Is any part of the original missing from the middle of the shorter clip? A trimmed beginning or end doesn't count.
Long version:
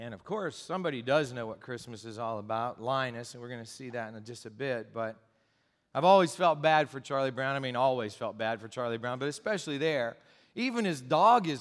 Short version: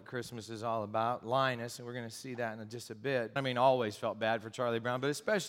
yes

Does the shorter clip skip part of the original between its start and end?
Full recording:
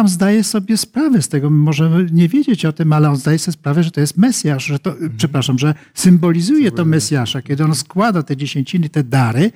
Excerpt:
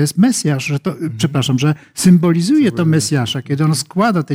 no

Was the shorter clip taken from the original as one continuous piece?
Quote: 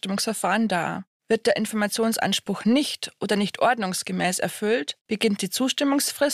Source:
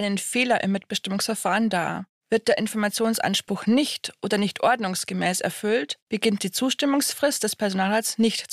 yes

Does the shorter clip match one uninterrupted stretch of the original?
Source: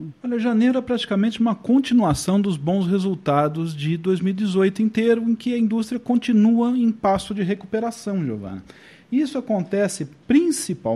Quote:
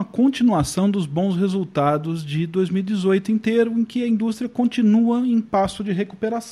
yes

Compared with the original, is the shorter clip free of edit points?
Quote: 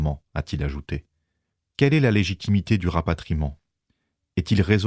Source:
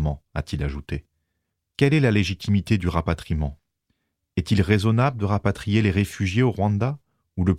yes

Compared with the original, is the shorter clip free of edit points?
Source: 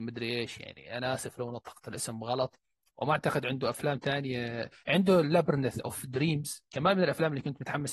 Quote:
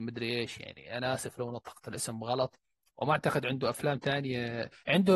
yes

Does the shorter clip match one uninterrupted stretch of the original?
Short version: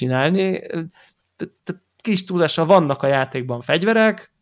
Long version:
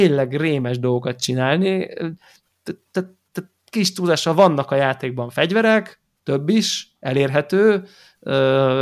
no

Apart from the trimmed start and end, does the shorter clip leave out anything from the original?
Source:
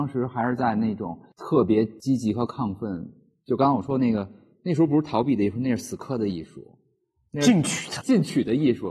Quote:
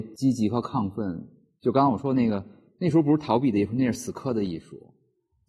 no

